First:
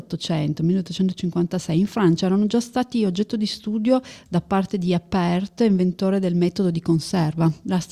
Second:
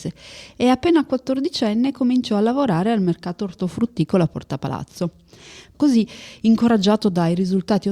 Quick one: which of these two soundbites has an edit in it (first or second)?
second